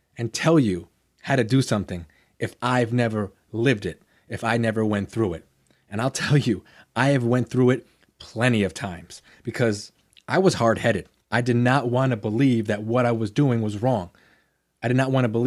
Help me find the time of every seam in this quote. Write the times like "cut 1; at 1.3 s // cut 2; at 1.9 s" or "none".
cut 1; at 11.2 s